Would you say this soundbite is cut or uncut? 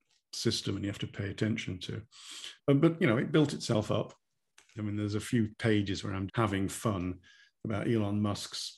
cut